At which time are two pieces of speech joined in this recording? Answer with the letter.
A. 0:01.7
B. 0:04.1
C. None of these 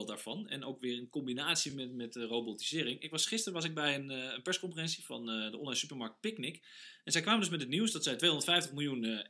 C